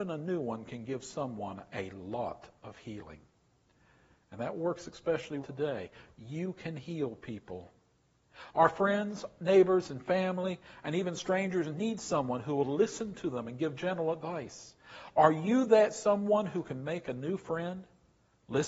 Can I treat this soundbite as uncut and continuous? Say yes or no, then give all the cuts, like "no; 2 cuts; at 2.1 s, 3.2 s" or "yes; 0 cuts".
no; 1 cut; at 5.4 s